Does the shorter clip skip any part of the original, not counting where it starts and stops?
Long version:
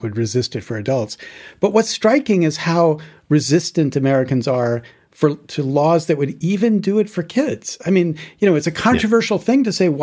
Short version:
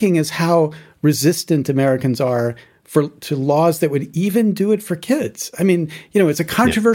no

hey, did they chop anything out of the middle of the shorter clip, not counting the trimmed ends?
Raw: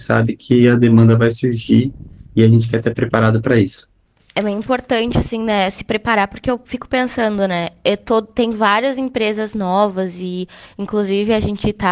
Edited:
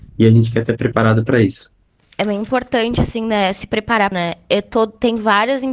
yes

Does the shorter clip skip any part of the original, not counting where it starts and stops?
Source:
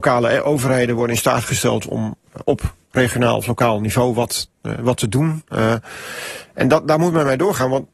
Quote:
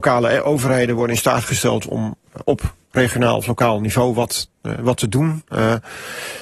no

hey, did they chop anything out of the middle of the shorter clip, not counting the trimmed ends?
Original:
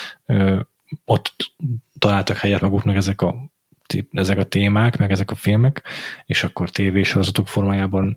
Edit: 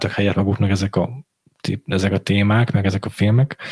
no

